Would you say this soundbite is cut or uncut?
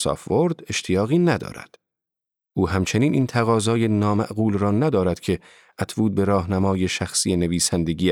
uncut